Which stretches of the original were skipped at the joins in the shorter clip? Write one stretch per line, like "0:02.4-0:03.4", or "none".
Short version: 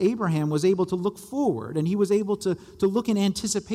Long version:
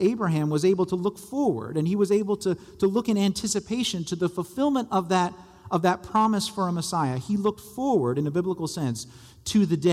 none